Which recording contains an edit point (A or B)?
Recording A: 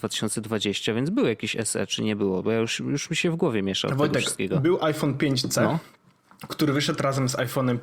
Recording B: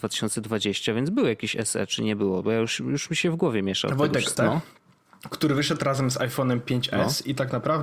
B